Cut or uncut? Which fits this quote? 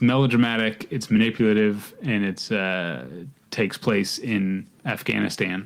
cut